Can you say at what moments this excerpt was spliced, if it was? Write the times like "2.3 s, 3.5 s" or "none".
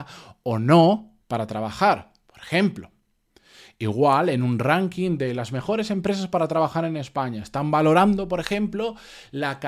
1.2 s